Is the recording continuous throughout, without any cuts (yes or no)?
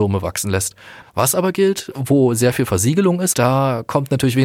no